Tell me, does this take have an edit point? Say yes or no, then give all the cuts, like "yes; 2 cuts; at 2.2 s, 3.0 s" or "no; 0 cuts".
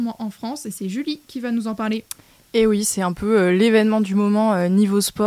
no; 0 cuts